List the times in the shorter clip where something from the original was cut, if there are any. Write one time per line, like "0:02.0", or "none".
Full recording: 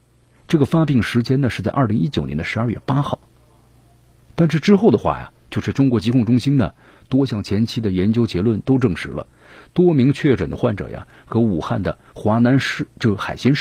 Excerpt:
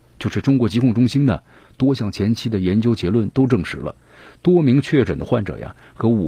none

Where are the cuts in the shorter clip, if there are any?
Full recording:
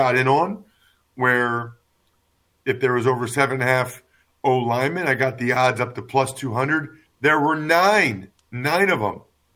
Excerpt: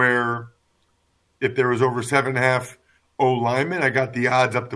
none

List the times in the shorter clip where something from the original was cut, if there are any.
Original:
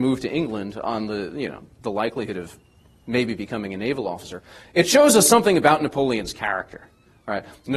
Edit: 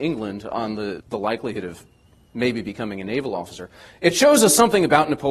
0:01.0

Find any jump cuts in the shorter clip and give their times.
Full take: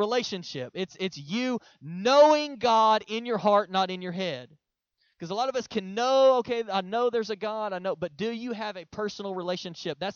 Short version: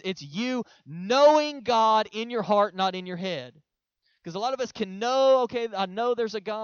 none

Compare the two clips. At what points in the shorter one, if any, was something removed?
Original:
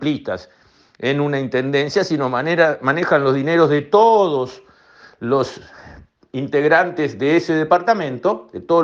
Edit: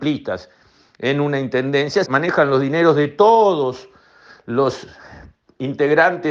0:02.0

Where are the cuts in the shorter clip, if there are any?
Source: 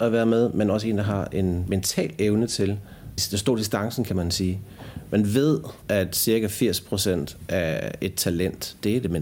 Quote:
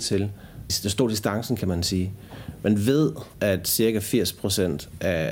none

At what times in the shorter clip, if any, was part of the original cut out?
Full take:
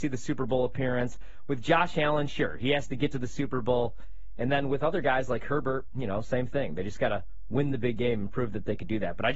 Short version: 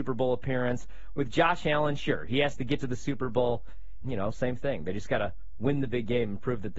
0:04.0

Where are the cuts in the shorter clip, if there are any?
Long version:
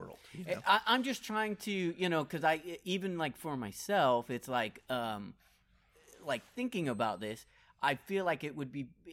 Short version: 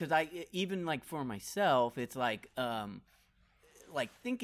none

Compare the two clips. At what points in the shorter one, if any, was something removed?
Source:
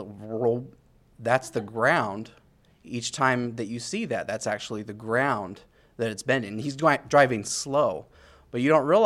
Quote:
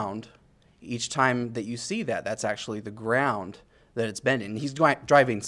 none

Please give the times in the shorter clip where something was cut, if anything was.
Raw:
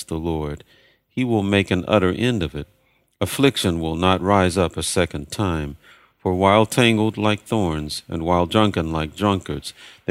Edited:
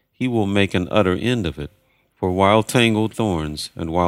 0:02.1
0:03.1

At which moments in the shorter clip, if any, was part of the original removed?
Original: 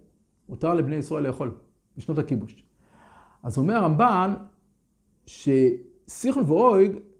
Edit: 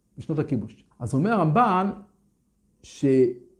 0:00.9

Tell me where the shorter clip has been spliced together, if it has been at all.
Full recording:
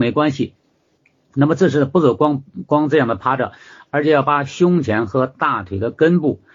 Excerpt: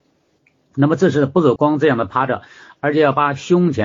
0:01.6

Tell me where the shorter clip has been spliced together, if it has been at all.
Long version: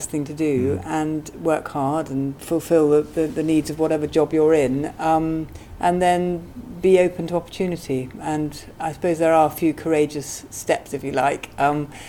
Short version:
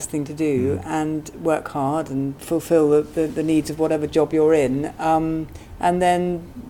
none

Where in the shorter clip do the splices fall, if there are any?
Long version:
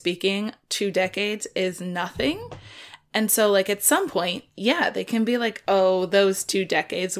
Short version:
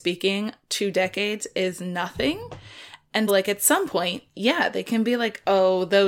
0:03.3

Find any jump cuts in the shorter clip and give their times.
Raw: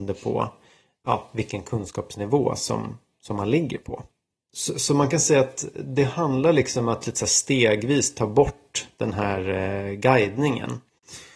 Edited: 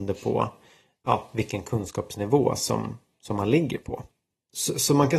none

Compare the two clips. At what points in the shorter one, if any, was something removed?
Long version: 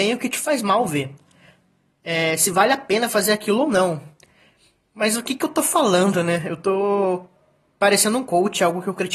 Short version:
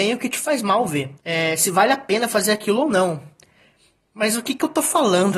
0:01.2

